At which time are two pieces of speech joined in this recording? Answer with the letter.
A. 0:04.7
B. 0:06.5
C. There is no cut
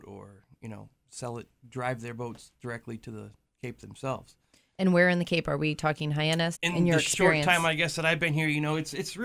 B